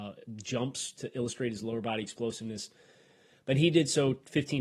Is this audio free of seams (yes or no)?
yes